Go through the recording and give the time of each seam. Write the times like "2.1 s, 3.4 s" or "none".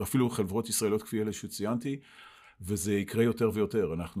none